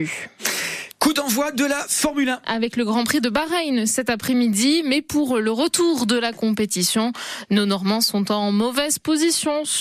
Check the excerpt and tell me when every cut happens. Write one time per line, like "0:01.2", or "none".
none